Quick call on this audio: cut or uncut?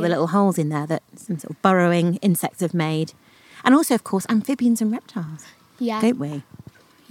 cut